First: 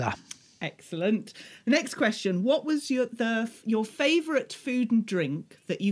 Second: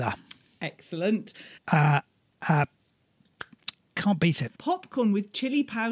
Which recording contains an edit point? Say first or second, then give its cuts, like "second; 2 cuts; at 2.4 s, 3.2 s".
second; 2 cuts; at 1.6 s, 4.5 s